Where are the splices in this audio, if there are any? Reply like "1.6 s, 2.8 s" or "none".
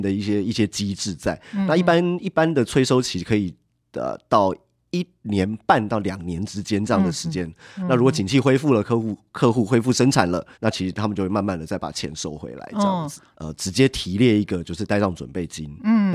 10.5 s, 13.3 s